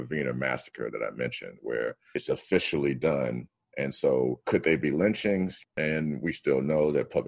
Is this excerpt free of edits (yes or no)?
no